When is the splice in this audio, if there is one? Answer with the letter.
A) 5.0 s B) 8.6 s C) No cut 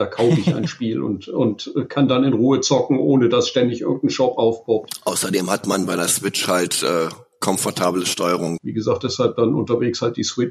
B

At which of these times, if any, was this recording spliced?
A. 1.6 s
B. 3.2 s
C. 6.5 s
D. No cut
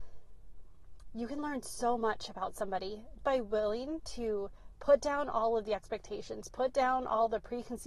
B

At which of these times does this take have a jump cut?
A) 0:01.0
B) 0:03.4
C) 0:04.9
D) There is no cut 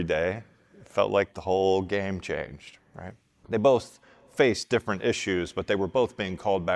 B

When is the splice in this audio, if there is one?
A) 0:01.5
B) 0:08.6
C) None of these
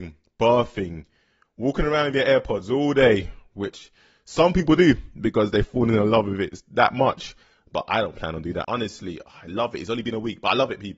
B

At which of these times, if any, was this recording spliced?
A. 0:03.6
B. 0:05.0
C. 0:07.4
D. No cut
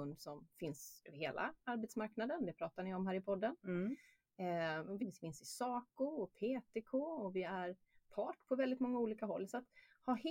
B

